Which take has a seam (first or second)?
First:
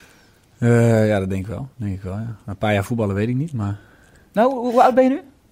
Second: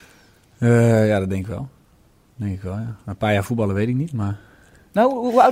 first